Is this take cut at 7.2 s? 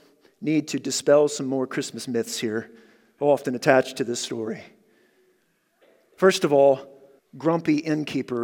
yes; 1 cut; at 7.2 s

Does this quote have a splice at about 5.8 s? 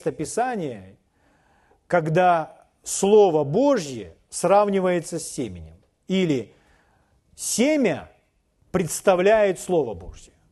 no; 0 cuts

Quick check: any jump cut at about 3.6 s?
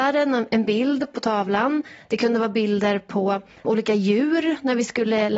yes; 1 cut; at 3.6 s

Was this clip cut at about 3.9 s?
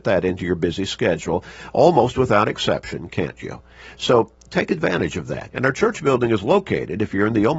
no; 1 cut; at 5.5 s

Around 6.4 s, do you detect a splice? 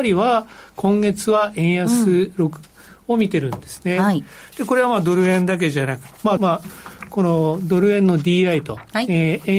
yes; 1 cut; at 6.4 s

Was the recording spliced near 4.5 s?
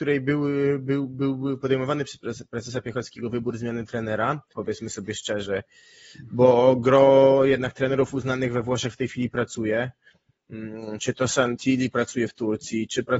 yes; 1 cut; at 4.5 s

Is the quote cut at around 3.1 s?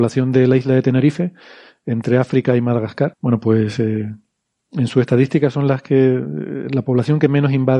yes; 1 cut; at 3.1 s

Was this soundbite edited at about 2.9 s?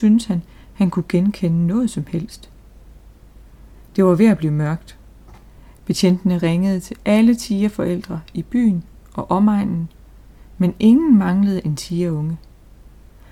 no; 1 cut; at 5.8 s

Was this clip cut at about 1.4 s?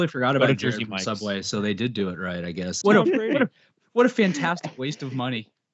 no; 1 cut; at 2.8 s

